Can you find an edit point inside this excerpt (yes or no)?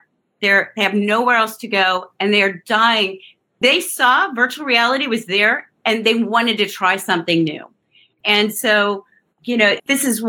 no